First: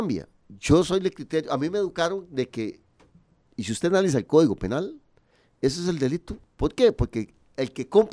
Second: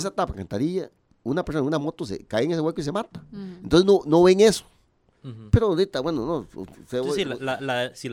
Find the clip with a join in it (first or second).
first